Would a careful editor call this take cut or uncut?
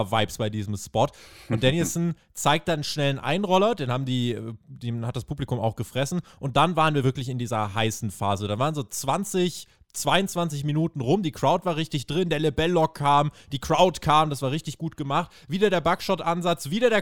uncut